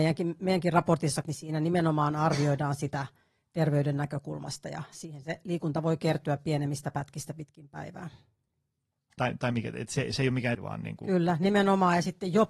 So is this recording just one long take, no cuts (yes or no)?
no